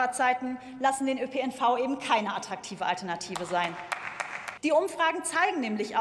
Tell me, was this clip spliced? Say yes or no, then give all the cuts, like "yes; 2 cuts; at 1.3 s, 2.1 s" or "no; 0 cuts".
yes; 1 cut; at 4.6 s